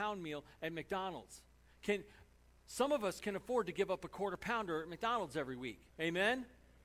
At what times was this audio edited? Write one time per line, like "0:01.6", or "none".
0:05.9